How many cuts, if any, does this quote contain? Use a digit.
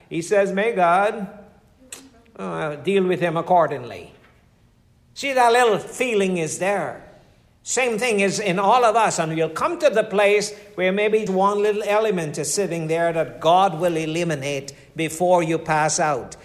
1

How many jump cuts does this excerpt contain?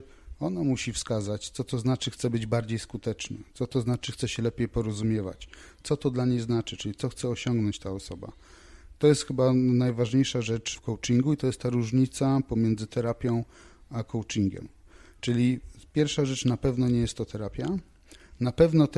1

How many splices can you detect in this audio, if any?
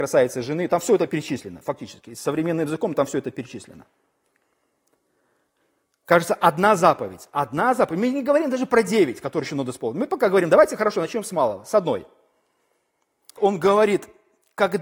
1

